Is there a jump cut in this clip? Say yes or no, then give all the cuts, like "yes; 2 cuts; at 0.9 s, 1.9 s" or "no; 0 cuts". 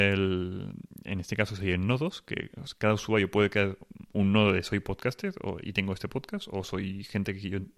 no; 0 cuts